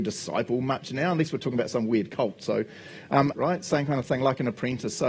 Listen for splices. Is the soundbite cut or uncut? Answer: cut